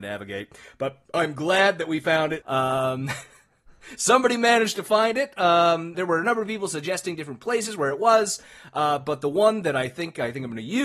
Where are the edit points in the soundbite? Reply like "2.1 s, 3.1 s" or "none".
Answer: 1.0 s, 2.4 s, 5.9 s